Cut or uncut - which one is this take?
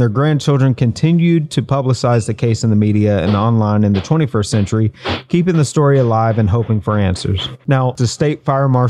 uncut